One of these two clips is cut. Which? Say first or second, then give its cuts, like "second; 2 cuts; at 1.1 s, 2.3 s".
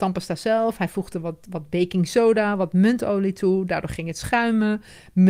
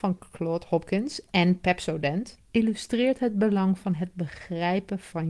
second; 1 cut; at 2.4 s